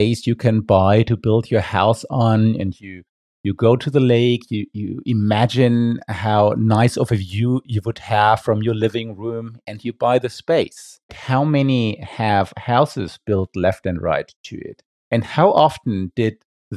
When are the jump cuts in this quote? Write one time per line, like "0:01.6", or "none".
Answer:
0:11.1